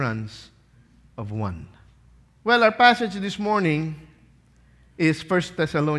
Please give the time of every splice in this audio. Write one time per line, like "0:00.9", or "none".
0:02.4